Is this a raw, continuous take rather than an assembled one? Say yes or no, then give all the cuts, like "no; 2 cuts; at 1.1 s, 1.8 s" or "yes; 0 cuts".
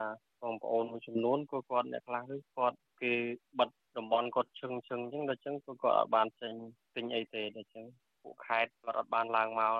yes; 0 cuts